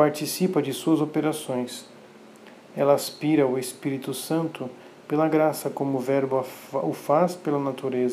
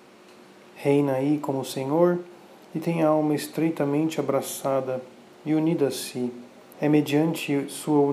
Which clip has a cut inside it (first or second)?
second